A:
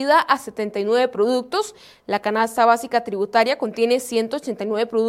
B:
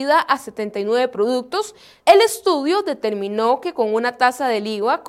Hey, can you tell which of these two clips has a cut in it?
B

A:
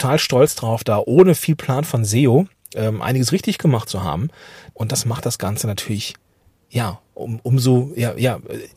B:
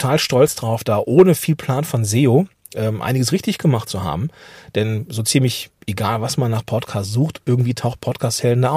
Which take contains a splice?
A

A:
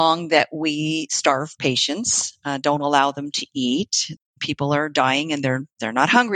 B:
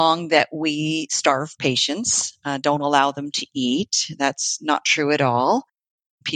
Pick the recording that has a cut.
A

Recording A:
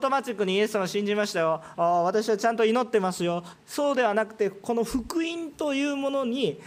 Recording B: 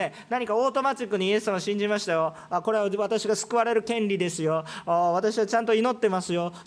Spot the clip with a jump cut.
A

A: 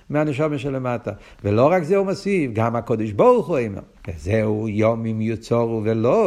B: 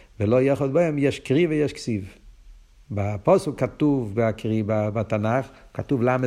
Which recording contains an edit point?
A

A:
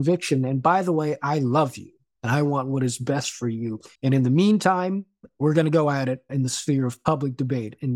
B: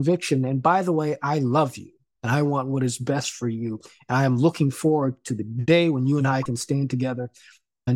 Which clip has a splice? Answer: A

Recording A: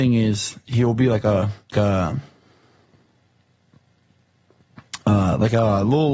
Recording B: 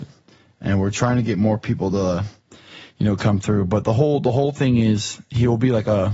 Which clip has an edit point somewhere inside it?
A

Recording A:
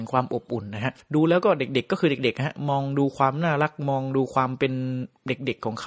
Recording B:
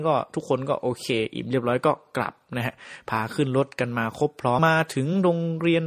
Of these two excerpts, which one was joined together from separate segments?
B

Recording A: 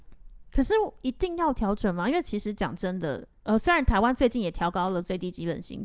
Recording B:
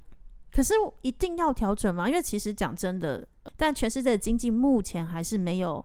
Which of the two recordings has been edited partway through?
B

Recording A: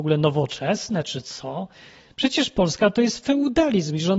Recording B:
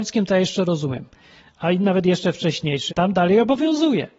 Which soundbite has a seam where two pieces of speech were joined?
B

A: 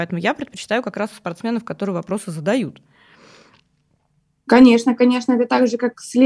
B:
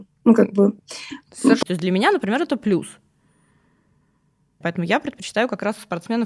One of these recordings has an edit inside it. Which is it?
B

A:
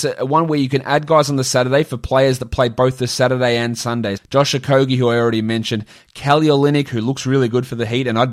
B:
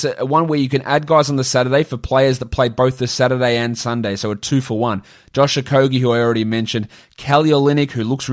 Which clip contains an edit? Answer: A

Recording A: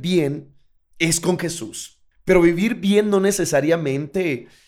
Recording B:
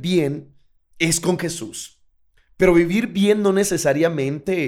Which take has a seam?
A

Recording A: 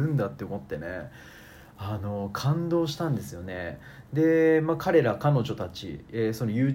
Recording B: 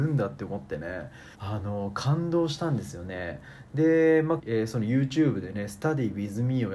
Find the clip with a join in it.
B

